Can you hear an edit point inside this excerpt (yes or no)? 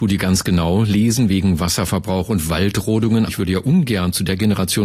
yes